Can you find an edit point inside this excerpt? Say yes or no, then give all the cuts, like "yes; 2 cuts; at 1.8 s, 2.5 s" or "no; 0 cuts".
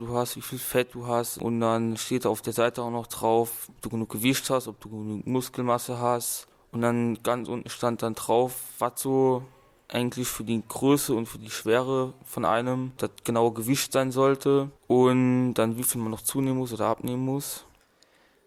yes; 1 cut; at 3.7 s